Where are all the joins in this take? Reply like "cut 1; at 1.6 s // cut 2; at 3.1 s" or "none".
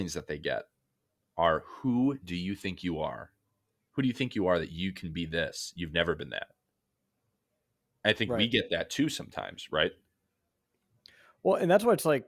none